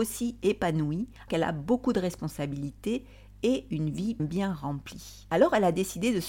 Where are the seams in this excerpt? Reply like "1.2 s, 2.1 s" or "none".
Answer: 1.3 s, 4.2 s